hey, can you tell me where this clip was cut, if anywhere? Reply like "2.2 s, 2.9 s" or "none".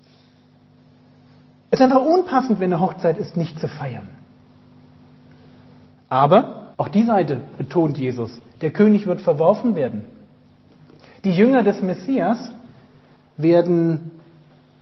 6.7 s